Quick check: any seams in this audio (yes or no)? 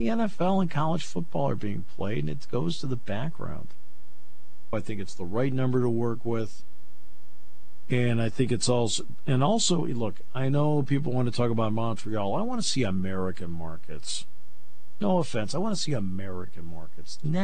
yes